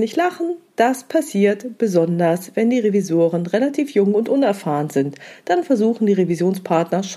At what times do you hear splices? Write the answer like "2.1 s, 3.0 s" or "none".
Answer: none